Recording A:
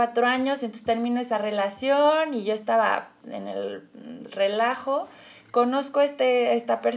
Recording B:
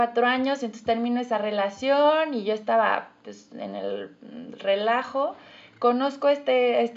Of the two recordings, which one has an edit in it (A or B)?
A